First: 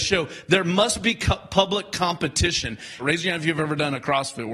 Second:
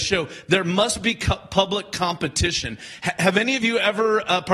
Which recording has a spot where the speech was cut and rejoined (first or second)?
first